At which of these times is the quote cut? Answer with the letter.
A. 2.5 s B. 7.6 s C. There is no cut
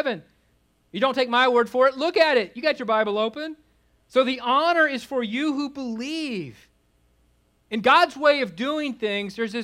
C